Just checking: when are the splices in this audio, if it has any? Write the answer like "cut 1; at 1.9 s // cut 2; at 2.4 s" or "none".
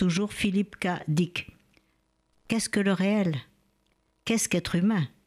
none